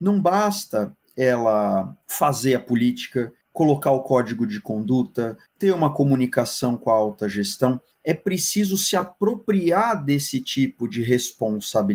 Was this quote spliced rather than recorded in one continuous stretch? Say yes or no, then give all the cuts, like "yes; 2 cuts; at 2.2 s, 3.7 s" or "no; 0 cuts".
no; 0 cuts